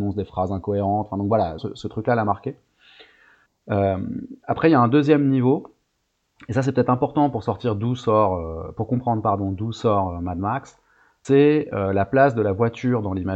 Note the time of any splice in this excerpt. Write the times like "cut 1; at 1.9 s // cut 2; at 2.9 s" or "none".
cut 1; at 1.6 s